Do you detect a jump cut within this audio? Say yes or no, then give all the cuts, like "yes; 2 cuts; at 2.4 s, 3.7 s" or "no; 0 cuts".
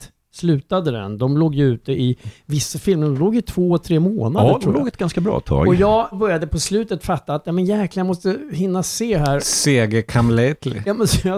no; 0 cuts